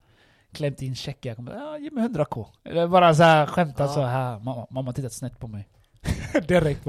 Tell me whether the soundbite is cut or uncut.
uncut